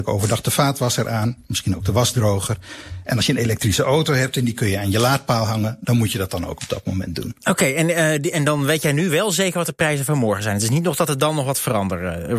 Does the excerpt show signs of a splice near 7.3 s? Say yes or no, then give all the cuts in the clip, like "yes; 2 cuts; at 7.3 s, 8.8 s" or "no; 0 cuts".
no; 0 cuts